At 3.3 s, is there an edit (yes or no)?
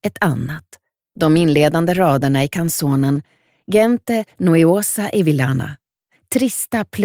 no